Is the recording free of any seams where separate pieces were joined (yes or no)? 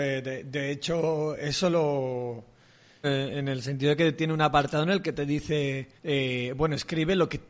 no